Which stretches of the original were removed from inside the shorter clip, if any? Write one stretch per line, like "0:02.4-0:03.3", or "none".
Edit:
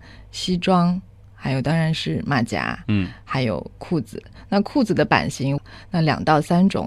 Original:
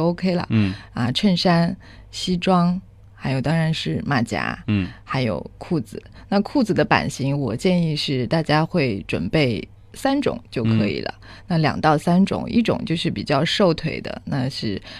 0:07.4-0:11.1